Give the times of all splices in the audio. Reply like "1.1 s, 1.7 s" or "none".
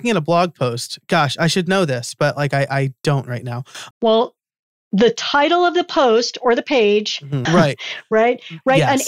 3.9 s, 7.5 s